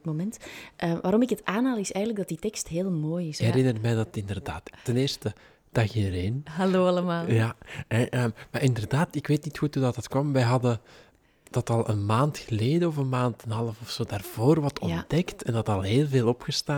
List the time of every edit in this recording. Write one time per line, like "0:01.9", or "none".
0:03.4